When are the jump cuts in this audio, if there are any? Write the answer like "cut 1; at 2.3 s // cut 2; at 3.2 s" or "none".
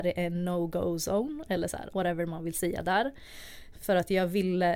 cut 1; at 1.9 s // cut 2; at 3.7 s

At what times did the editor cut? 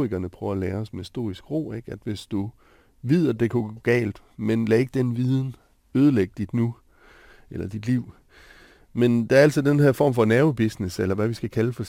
none

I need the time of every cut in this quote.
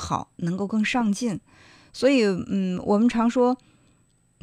none

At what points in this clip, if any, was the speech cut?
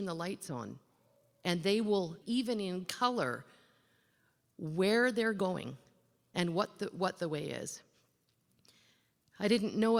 cut 1; at 2.2 s

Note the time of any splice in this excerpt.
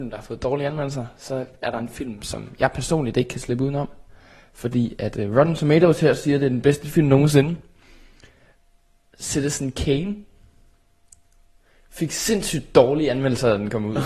none

